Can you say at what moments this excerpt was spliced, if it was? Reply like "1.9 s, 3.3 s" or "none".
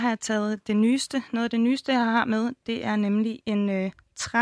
none